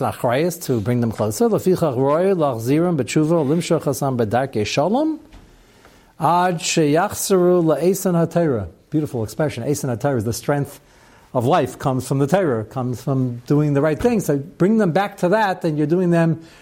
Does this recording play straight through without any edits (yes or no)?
yes